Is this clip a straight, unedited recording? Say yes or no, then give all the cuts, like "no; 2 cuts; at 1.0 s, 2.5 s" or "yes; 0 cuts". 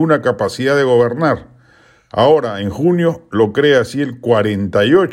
yes; 0 cuts